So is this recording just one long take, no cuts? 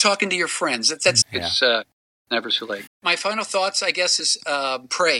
no; 3 cuts; at 1.2 s, 2.9 s, 4.2 s

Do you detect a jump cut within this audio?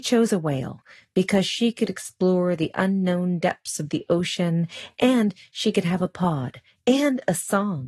no; 0 cuts

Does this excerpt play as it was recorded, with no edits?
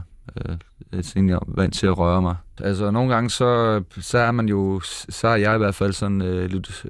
no; 1 cut; at 2.6 s

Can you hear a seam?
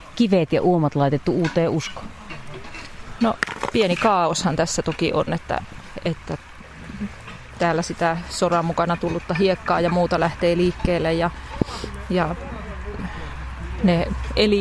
no; 0 cuts

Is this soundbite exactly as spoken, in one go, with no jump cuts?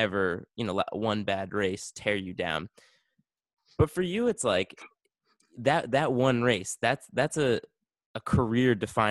yes; 0 cuts

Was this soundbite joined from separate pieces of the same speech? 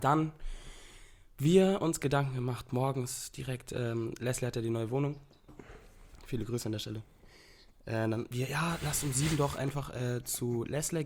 no; 0 cuts

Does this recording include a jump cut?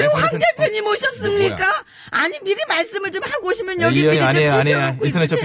no; 0 cuts

